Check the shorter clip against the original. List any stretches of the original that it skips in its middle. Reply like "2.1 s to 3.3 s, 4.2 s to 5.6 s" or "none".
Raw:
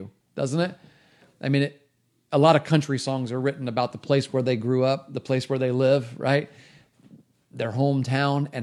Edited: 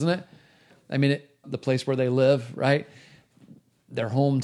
2.0 s to 5.1 s

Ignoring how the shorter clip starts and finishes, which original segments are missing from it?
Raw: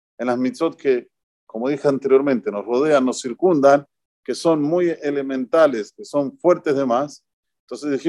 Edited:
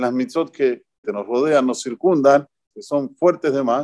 1.3 s to 2.4 s, 4.1 s to 5.9 s

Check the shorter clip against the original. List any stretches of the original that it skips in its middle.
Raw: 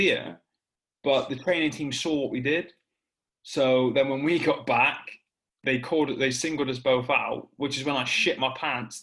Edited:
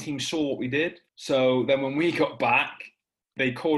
2.8 s to 3.4 s

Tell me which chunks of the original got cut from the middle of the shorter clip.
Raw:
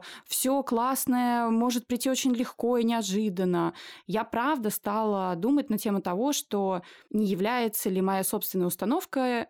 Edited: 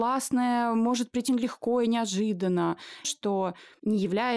2.0 s to 2.2 s, 4.0 s to 6.3 s

